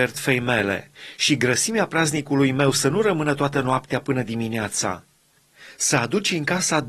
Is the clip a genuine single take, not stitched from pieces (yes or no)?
yes